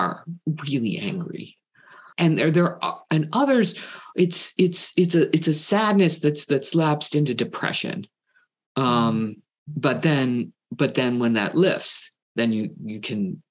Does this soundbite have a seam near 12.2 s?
yes; 2 cuts; at 2.1 s, 12.2 s

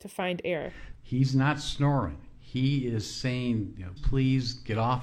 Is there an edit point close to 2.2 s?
no; 2 cuts; at 0.9 s, 4.0 s

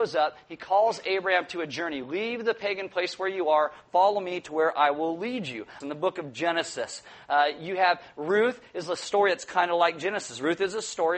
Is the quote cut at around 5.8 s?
yes; 1 cut; at 5.8 s

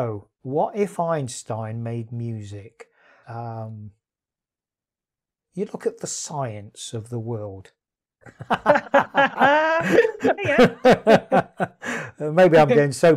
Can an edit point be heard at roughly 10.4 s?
yes; 3 cuts; at 3.2 s, 8.2 s, 10.4 s

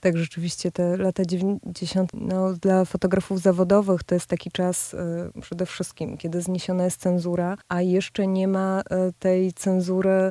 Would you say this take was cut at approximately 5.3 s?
no; 2 cuts; at 2.1 s, 7.6 s

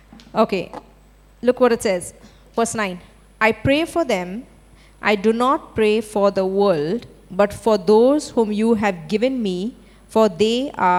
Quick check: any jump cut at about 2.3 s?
no; 0 cuts

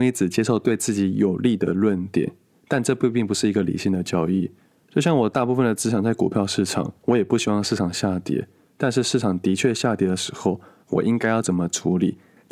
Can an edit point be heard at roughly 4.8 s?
yes; 1 cut; at 4.8 s

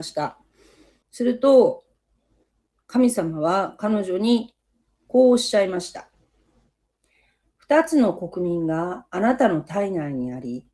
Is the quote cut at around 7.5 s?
no; 1 cut; at 1.0 s

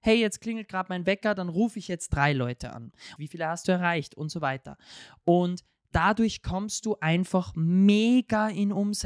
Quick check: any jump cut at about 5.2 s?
no; 1 cut; at 3.2 s

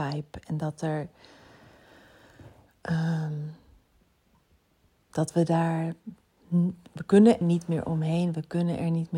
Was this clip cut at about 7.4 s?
yes; 1 cut; at 7.4 s

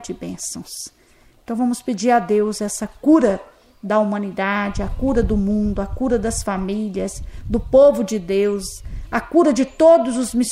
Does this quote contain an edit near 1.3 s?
no; 0 cuts

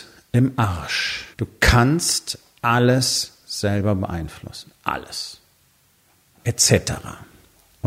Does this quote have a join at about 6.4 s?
yes; 2 cuts; at 1.3 s, 6.4 s

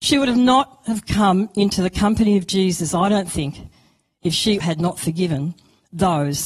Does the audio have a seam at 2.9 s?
no; 1 cut; at 4.6 s

